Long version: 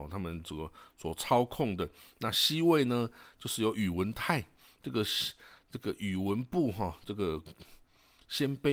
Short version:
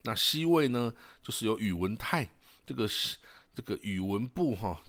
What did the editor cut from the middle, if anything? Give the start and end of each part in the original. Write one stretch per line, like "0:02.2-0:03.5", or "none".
none